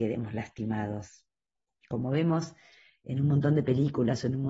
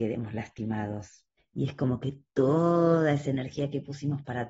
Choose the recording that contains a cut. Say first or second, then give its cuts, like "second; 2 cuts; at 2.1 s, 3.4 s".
second; 1 cut; at 1.4 s